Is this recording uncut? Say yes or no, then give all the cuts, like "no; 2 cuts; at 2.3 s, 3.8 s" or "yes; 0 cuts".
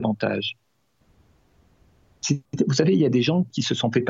yes; 0 cuts